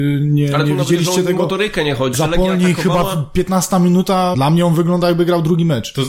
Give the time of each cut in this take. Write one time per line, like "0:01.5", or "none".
0:02.1
0:04.3